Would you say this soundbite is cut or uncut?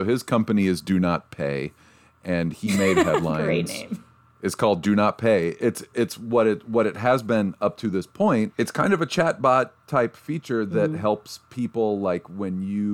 uncut